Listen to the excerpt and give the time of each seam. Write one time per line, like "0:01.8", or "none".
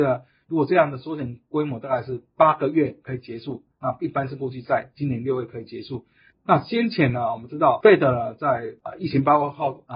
0:06.3